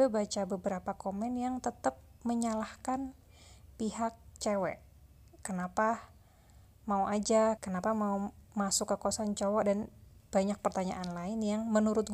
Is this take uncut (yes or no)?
no